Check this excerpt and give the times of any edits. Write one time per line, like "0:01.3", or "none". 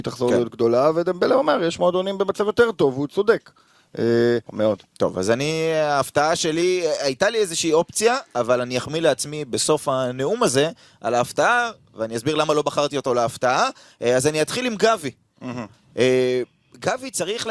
0:04.5